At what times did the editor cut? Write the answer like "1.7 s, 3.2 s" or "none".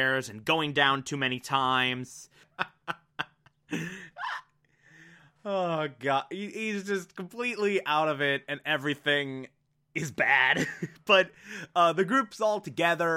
2.4 s